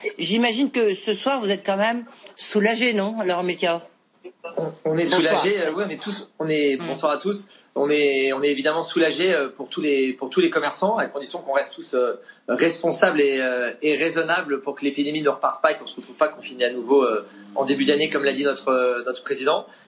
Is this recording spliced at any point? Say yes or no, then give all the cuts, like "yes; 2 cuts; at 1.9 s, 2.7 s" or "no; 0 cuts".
yes; 1 cut; at 6.8 s